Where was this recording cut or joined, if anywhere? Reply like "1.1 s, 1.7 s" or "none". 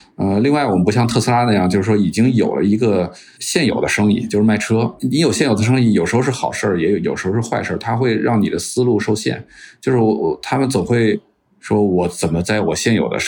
none